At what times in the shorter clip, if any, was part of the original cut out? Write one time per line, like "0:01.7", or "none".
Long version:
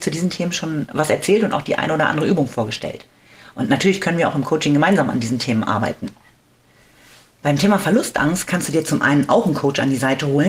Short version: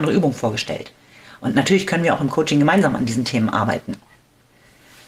none